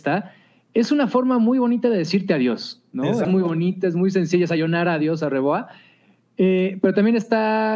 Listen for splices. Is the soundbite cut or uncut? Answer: cut